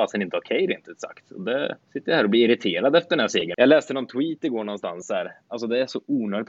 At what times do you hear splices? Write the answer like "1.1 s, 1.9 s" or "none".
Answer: 1.8 s, 3.5 s